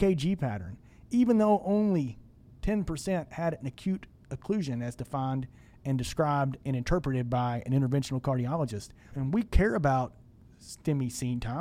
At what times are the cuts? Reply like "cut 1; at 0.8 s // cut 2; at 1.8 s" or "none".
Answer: cut 1; at 9.1 s